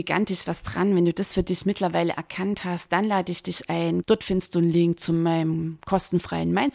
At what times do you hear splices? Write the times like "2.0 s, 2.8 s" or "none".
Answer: 4.0 s